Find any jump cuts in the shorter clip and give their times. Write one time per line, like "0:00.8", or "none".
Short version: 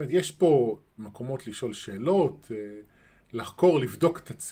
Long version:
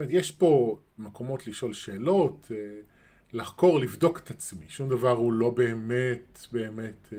none